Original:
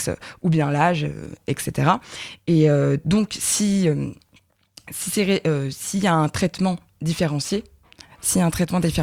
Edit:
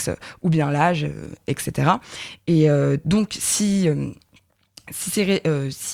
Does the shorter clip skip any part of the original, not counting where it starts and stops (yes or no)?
no